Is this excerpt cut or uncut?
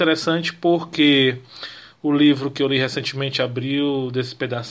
uncut